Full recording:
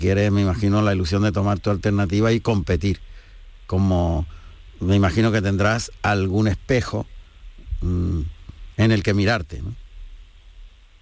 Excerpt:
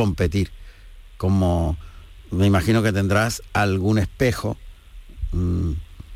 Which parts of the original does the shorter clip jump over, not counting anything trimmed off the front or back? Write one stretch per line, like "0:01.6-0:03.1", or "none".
none